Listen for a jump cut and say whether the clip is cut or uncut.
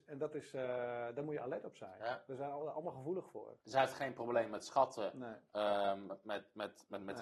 cut